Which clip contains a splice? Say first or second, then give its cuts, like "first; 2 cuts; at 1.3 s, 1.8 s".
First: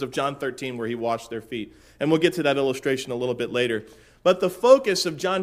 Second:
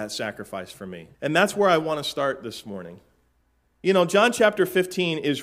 second; 1 cut; at 1.1 s